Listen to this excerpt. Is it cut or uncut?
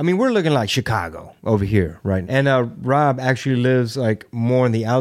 cut